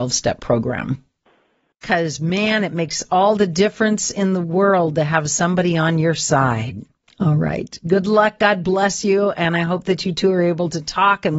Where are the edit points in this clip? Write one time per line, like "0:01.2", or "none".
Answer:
0:07.0